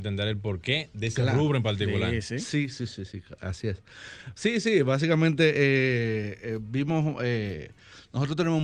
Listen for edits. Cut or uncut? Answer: uncut